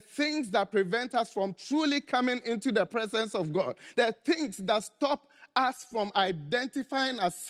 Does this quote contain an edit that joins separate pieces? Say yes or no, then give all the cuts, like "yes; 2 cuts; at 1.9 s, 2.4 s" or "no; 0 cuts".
no; 0 cuts